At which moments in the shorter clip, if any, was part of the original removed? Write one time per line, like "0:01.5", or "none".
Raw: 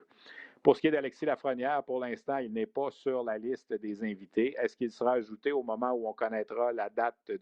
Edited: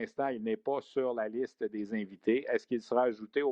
none